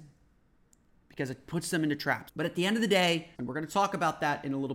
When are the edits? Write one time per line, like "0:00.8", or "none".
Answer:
0:02.3
0:03.3